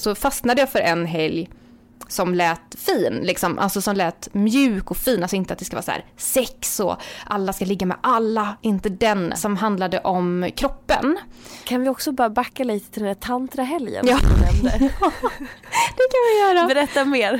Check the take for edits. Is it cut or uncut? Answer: cut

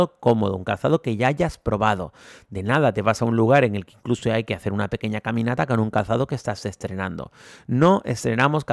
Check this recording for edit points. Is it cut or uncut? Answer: uncut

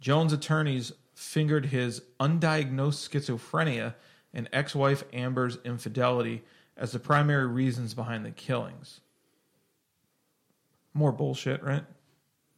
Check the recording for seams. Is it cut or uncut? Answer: uncut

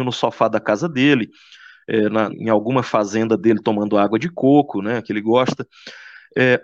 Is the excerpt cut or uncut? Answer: cut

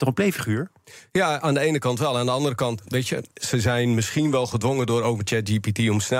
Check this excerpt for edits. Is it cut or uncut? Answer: cut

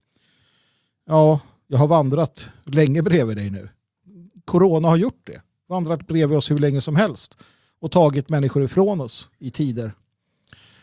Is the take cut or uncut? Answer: uncut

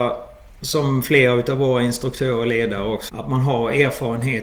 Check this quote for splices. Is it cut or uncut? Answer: cut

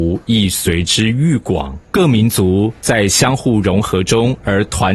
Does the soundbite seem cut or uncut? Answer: cut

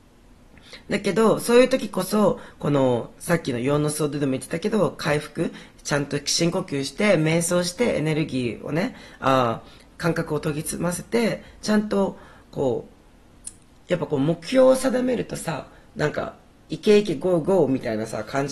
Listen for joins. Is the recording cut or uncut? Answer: cut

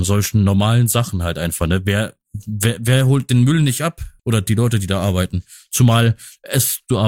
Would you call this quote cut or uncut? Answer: cut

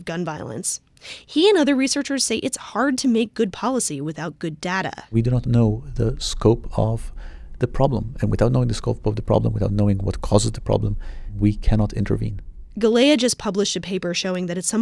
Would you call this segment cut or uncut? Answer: uncut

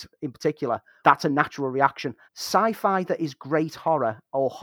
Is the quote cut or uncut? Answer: cut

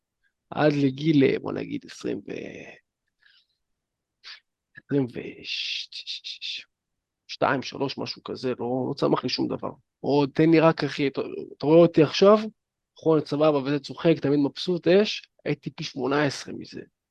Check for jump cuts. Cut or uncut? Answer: cut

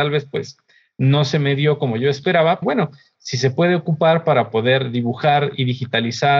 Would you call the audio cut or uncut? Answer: cut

